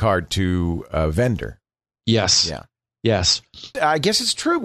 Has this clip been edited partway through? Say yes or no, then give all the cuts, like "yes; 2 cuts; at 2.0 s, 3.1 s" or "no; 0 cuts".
yes; 1 cut; at 3.7 s